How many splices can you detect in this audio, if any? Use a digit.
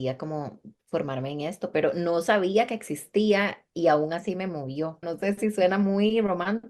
1